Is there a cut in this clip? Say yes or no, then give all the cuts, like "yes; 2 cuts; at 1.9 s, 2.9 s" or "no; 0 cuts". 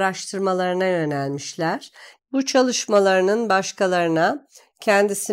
yes; 1 cut; at 2.2 s